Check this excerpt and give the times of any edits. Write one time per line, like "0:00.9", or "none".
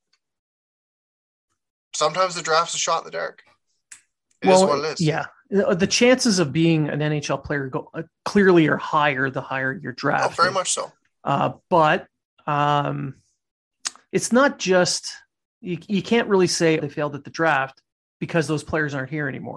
0:14.1
0:16.8